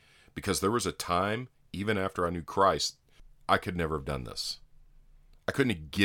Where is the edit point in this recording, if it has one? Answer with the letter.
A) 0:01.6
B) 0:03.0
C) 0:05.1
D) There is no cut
D